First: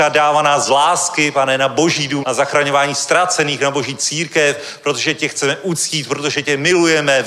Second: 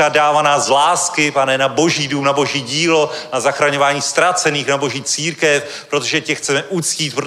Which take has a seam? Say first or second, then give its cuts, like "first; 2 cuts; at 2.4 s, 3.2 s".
first; 1 cut; at 2.2 s